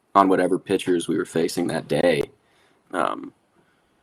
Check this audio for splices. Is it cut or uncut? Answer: cut